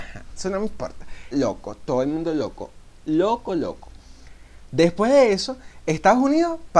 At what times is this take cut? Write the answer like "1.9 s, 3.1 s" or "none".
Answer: 1.3 s, 3.5 s